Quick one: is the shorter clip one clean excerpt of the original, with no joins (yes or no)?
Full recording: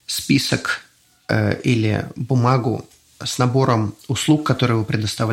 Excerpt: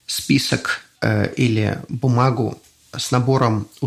no